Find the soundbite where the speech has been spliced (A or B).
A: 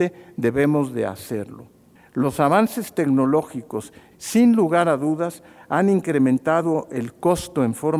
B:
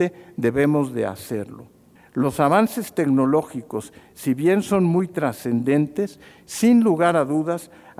A